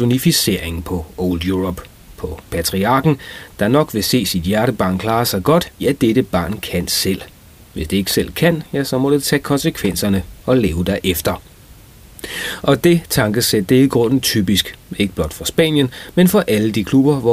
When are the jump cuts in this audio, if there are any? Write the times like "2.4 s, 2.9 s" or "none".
5.8 s